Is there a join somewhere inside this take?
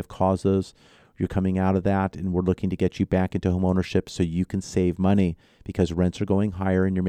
no; 0 cuts

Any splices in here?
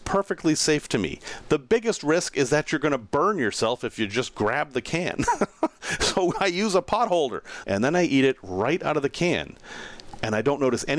yes; 1 cut; at 7.6 s

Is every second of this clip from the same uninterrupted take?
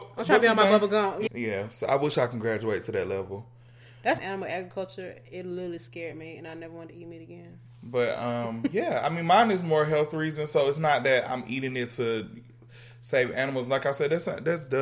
no; 2 cuts; at 1.3 s, 4.2 s

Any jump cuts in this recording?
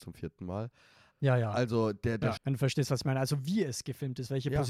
yes; 2 cuts; at 1.1 s, 2.4 s

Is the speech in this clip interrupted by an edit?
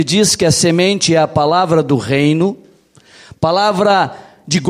no; 0 cuts

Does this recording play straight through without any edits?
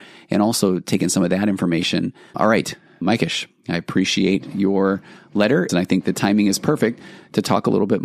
no; 2 cuts; at 2.3 s, 5.7 s

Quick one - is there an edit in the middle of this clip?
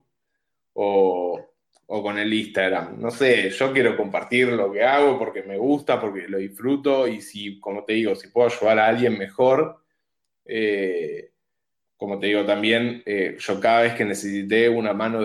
no; 0 cuts

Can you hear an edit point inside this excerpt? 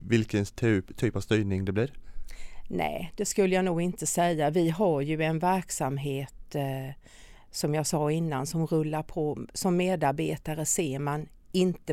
no; 0 cuts

